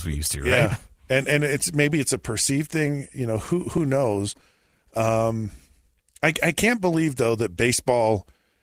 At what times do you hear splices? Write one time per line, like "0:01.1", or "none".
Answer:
none

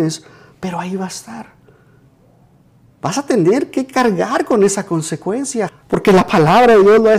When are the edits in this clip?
0:05.7

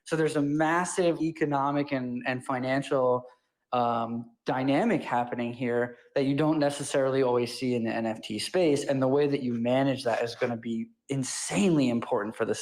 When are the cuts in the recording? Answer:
0:01.2

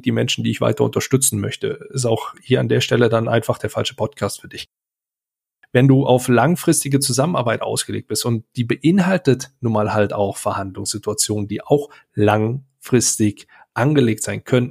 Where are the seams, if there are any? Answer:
none

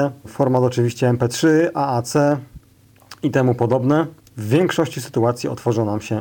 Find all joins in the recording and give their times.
none

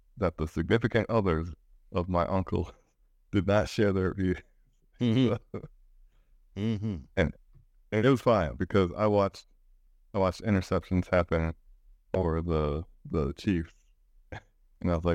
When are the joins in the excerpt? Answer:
none

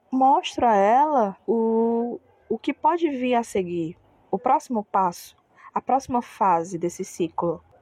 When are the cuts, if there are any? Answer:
none

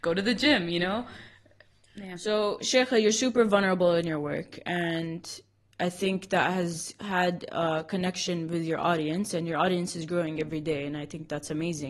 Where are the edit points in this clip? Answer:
none

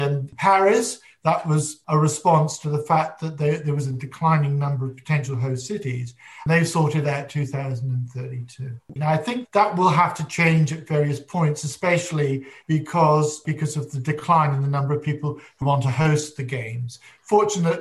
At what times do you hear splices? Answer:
0:06.5
0:09.0
0:15.6

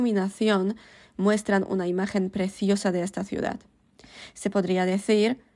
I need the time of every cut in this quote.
none

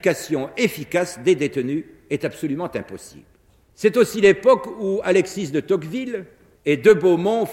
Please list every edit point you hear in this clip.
0:06.6

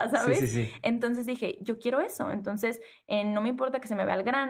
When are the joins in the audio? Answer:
none

